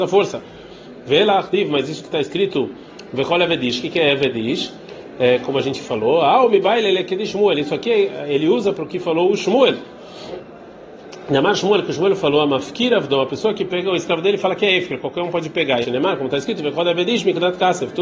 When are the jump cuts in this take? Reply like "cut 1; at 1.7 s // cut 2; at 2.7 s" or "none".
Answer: cut 1; at 15.8 s